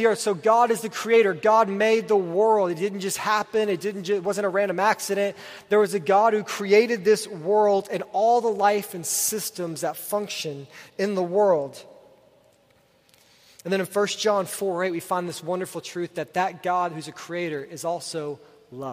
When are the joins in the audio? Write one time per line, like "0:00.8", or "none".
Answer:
none